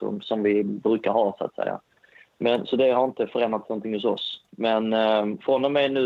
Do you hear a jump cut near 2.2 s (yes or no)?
no